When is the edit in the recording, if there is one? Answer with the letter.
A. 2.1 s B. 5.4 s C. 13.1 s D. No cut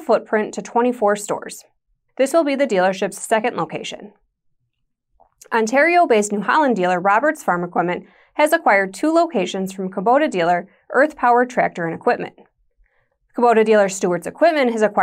A